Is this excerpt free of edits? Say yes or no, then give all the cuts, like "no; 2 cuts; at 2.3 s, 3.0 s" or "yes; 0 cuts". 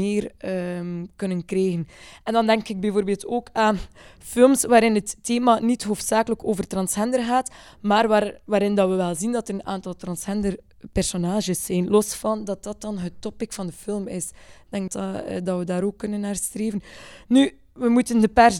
no; 1 cut; at 14.9 s